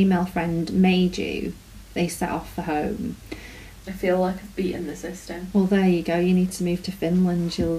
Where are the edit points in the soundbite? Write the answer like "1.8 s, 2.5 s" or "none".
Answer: 3.8 s